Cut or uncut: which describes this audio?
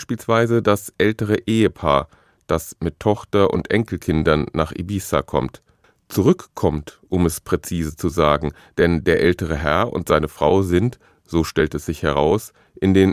uncut